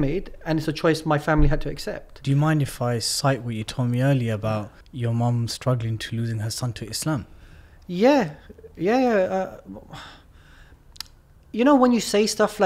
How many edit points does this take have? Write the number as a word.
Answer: one